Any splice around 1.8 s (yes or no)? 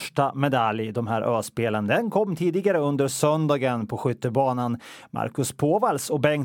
no